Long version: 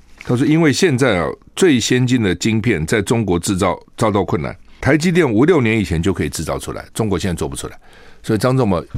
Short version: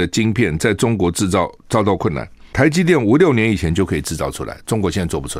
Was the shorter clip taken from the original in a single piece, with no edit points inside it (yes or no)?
yes